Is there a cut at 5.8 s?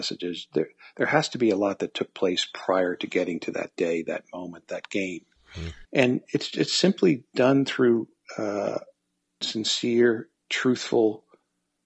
yes; 2 cuts; at 5.8 s, 9.4 s

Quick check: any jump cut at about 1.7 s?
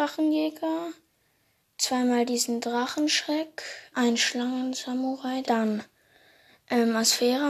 no; 2 cuts; at 3.9 s, 5.4 s

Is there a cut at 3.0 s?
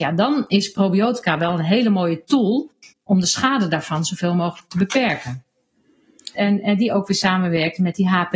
no; 1 cut; at 6.3 s

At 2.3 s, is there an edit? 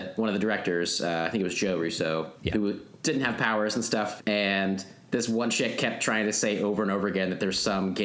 yes; 2 cuts; at 2.3 s, 4.2 s

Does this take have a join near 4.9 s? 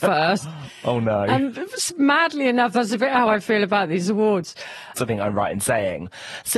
yes; 1 cut; at 4.9 s

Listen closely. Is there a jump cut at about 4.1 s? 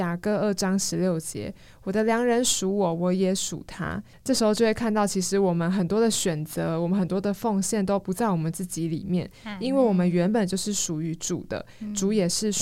yes; 1 cut; at 4.1 s

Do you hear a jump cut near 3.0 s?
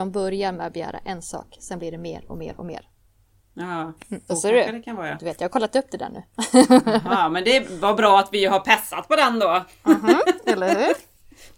no; 1 cut; at 4.3 s

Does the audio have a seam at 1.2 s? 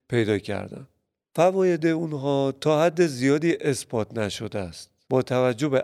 yes; 1 cut; at 1.2 s

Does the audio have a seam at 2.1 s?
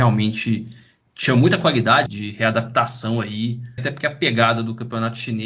yes; 2 cuts; at 2.1 s, 3.8 s

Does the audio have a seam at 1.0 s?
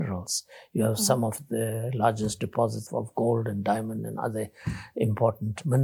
no; 1 cut; at 2.9 s

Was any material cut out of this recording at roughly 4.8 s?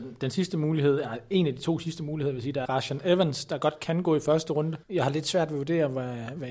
yes; 2 cuts; at 2.7 s, 4.8 s

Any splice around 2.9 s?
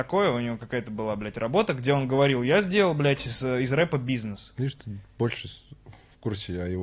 no; 0 cuts

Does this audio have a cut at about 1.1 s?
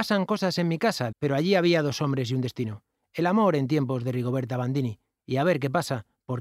yes; 1 cut; at 1.1 s

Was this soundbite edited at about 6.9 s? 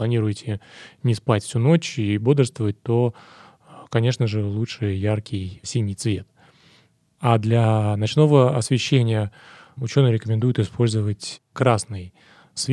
no; 0 cuts

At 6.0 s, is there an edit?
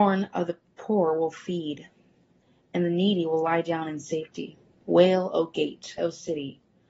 yes; 2 cuts; at 4.8 s, 6.0 s

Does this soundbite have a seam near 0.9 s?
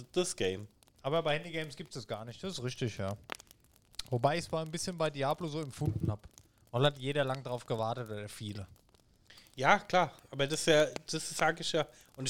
yes; 1 cut; at 0.9 s

